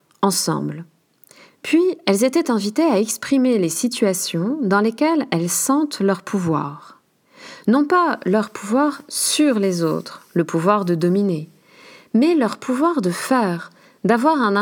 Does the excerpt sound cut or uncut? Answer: uncut